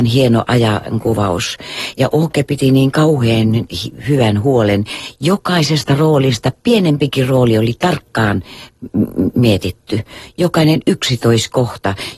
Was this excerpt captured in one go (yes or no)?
yes